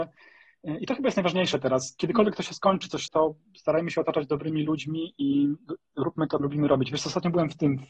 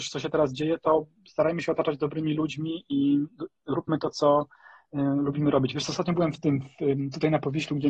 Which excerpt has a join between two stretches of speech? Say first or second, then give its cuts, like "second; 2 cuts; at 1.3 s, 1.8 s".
first; 2 cuts; at 3.1 s, 6.4 s